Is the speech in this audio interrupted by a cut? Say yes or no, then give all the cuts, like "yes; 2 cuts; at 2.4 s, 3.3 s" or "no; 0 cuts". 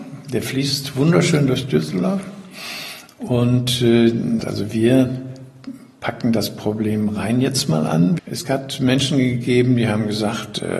yes; 2 cuts; at 4.4 s, 8.2 s